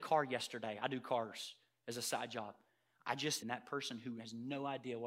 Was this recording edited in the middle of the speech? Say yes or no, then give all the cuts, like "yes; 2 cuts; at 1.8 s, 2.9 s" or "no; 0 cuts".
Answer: yes; 1 cut; at 3.4 s